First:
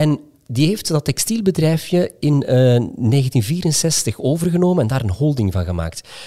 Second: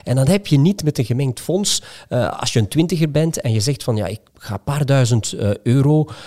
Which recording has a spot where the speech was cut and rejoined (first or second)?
second